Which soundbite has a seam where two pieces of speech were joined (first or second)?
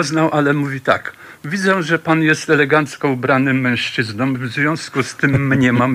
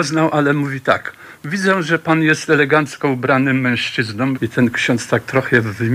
second